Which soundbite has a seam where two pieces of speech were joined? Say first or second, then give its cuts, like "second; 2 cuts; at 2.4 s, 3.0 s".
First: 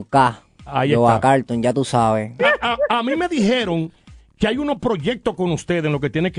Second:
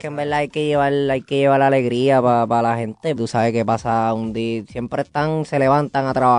second; 1 cut; at 3.2 s